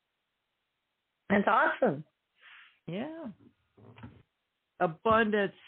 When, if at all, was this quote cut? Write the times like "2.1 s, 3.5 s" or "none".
none

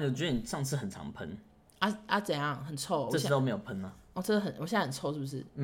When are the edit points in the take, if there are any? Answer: none

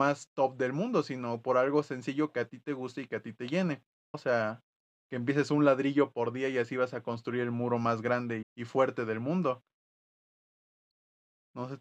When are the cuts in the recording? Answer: 4.1 s, 8.4 s

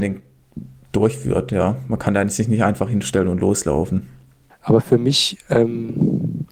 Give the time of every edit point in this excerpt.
4.5 s

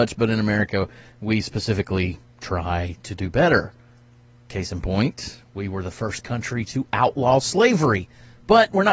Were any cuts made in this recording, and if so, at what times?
none

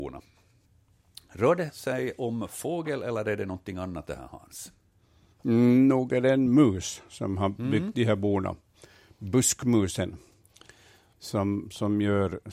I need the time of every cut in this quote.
none

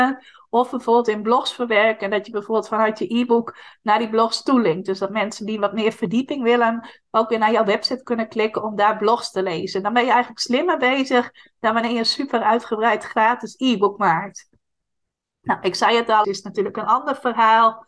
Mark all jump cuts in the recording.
16.2 s

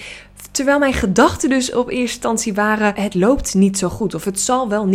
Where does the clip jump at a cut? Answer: 2.9 s

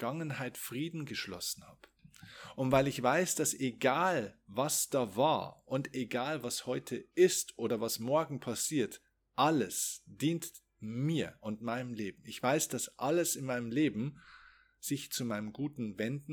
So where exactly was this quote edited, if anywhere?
none

